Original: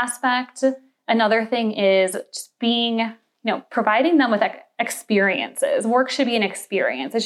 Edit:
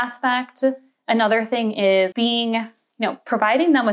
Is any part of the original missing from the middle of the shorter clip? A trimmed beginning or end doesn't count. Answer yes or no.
yes